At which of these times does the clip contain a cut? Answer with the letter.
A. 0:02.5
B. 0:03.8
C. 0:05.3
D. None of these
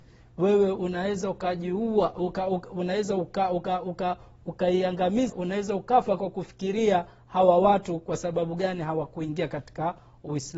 C